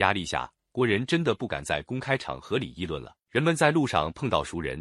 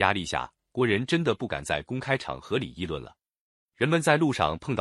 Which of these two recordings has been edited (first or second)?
first